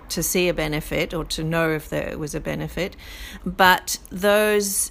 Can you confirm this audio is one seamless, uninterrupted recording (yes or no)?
no